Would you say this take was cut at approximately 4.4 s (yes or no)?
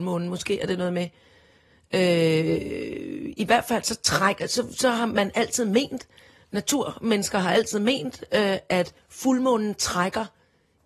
no